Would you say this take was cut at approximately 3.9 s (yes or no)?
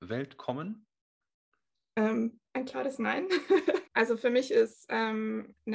yes